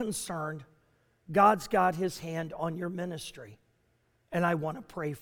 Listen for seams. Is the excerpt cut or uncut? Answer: uncut